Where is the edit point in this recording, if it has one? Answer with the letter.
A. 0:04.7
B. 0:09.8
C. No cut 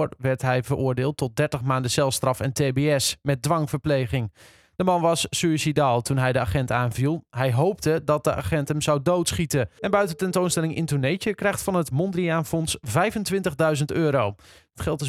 B